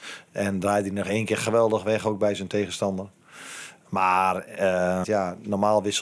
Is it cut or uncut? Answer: cut